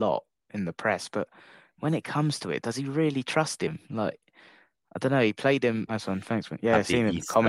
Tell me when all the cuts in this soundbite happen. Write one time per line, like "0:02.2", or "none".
0:05.9